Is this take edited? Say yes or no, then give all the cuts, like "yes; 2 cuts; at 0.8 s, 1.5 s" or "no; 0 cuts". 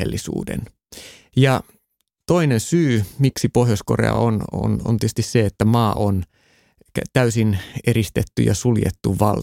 no; 0 cuts